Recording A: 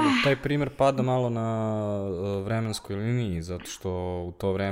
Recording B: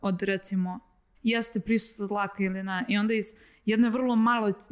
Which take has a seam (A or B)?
B